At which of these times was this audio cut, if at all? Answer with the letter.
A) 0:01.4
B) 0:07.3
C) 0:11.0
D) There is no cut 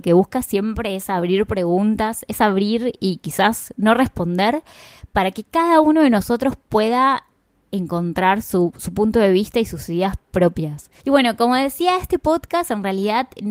C